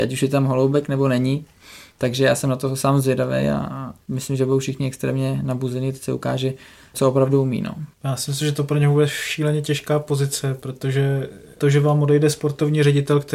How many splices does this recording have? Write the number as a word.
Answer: zero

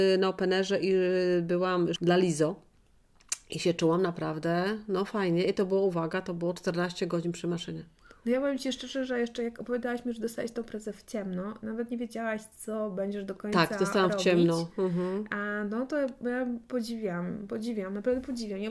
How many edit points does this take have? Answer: one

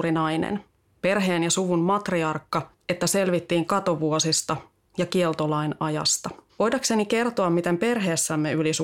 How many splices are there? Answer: two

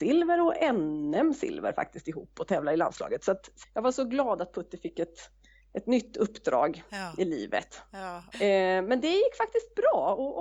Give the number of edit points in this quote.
two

